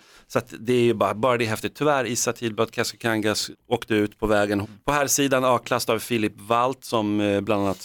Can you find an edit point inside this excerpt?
yes; 2 cuts; at 3.5 s, 4.6 s

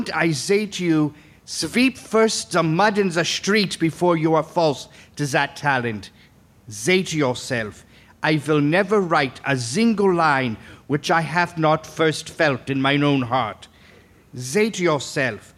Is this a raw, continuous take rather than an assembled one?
yes; 0 cuts

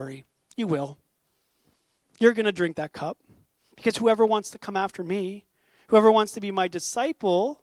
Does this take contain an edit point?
no; 0 cuts

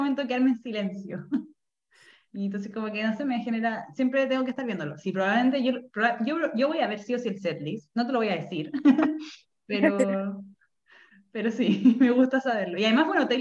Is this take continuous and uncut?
yes; 0 cuts

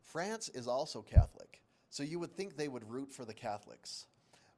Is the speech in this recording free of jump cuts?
yes; 0 cuts

